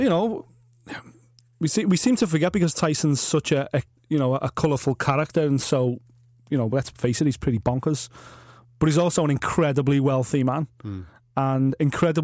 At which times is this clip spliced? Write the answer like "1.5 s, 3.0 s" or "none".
none